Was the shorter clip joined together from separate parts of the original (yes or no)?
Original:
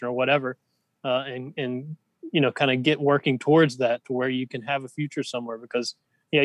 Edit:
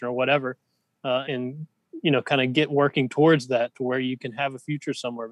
yes